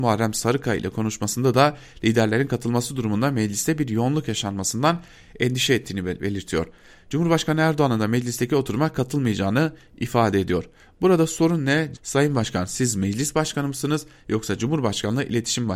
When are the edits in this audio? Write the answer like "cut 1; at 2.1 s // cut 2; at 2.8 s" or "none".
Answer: cut 1; at 11.9 s